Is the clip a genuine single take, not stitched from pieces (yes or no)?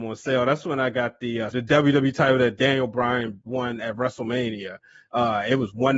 no